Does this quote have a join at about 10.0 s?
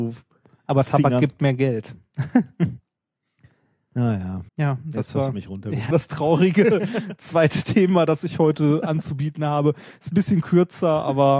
no; 2 cuts; at 4.5 s, 5.9 s

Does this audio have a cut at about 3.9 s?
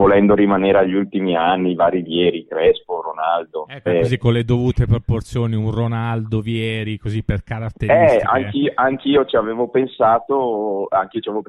yes; 1 cut; at 3.9 s

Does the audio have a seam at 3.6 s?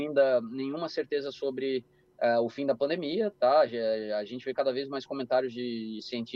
no; 0 cuts

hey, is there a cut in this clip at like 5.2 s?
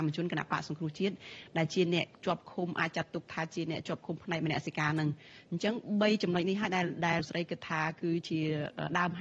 no; 2 cuts; at 2.2 s, 7.2 s

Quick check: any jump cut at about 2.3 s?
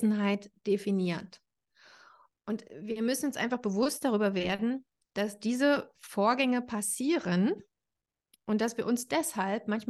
yes; 1 cut; at 2.3 s

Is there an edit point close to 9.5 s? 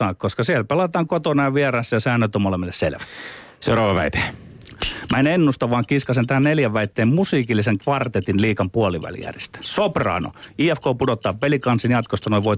no; 0 cuts

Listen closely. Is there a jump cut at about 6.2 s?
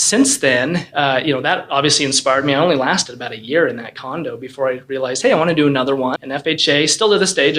yes; 1 cut; at 6.2 s

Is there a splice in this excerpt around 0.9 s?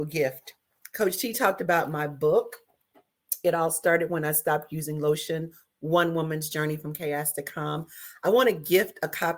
no; 0 cuts

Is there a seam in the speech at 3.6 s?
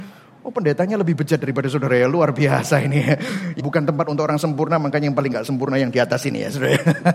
yes; 1 cut; at 3.6 s

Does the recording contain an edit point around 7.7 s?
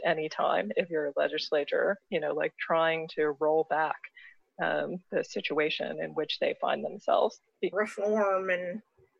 yes; 1 cut; at 7.7 s

